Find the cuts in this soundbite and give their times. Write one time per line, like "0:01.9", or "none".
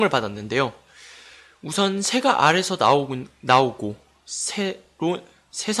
none